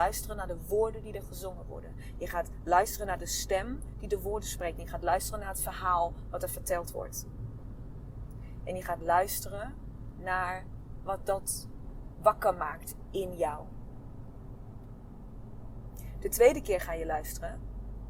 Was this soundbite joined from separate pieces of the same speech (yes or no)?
no